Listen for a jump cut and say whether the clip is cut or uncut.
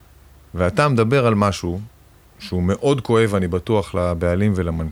uncut